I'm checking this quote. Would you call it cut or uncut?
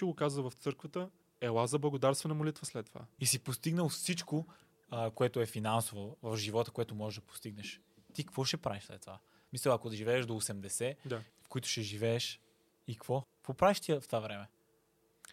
cut